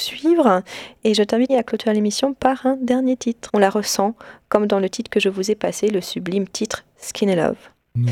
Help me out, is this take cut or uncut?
cut